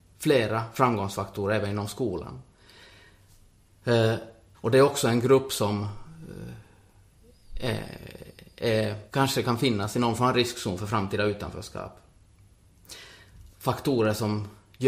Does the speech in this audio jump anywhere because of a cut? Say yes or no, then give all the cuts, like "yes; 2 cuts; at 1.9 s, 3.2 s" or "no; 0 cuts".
yes; 3 cuts; at 4.5 s, 9.1 s, 13.5 s